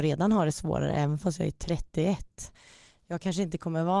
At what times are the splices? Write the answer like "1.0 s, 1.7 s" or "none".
none